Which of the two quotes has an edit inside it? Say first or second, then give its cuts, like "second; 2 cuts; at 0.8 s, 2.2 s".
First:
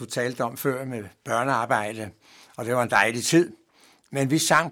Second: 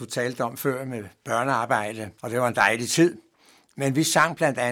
second; 1 cut; at 2.2 s